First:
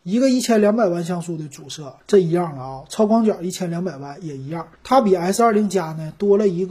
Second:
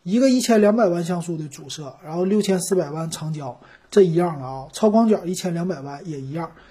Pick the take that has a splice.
first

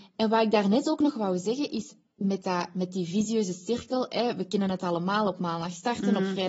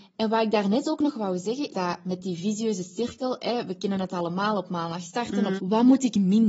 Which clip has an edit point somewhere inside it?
second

